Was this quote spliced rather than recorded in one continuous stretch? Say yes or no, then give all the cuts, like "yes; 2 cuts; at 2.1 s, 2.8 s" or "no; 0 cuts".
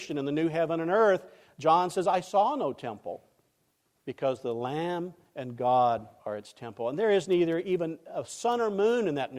yes; 2 cuts; at 3.9 s, 6.2 s